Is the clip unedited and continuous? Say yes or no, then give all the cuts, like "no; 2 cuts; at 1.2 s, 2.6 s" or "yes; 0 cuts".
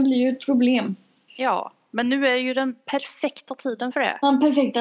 no; 1 cut; at 1.3 s